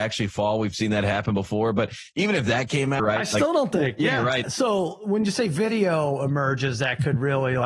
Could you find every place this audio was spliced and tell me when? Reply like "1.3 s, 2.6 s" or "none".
3.0 s, 4.4 s